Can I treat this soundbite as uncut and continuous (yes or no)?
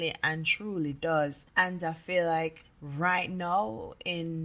yes